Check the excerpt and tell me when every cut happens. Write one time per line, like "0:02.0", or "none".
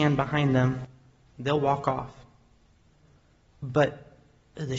0:03.4